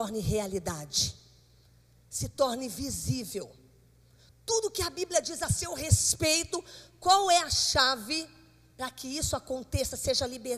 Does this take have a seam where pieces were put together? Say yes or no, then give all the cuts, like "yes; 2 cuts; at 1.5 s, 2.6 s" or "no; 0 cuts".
no; 0 cuts